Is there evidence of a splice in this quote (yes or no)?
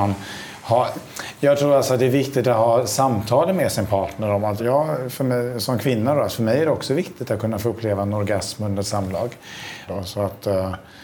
yes